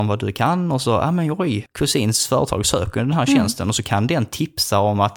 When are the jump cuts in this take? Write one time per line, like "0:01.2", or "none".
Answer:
0:01.7